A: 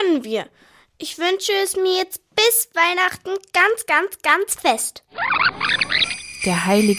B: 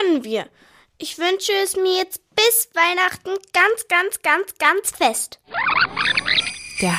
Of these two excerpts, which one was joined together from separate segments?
A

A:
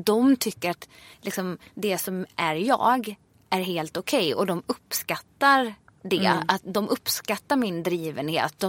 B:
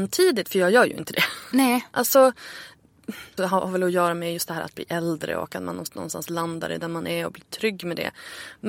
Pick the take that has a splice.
B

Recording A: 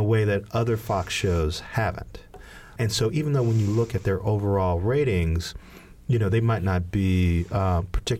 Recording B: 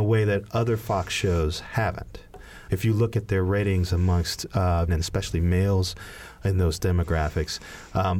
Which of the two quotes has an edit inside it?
B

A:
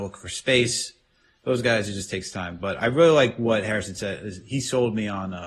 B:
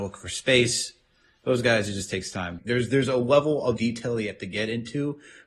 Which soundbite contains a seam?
B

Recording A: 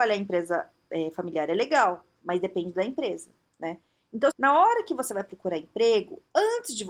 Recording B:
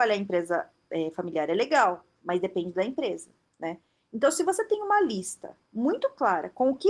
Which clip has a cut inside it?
A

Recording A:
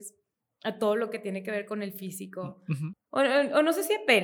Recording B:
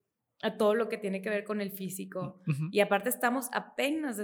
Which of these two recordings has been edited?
A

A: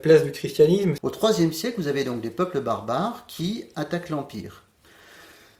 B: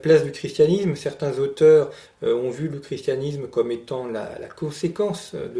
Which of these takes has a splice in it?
A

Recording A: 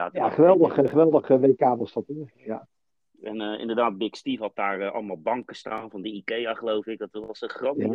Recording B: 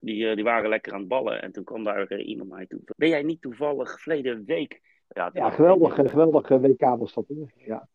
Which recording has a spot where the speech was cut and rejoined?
B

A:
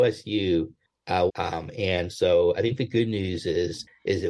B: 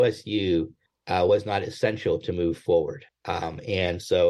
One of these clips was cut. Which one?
A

